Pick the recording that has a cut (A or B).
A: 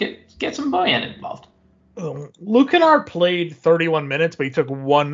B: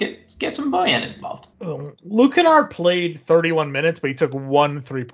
B